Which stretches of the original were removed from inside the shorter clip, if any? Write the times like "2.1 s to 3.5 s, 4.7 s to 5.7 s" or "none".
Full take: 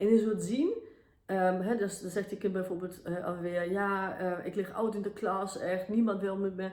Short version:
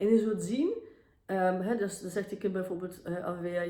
none